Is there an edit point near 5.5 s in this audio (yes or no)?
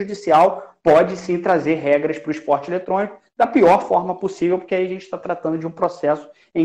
no